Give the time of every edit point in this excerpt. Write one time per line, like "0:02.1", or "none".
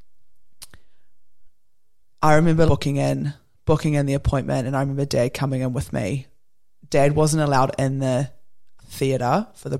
0:02.7
0:08.8